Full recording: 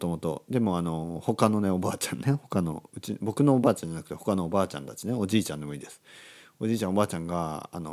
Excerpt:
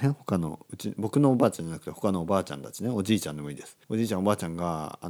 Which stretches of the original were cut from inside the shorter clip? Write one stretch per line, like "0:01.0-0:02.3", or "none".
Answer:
0:06.1-0:06.5